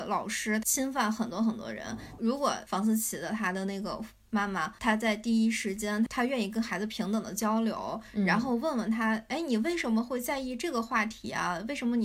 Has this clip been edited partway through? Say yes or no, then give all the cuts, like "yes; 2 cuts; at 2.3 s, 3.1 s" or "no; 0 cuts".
no; 0 cuts